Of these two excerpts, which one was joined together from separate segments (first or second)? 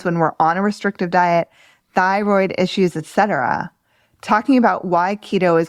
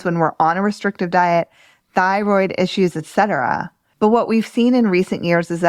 second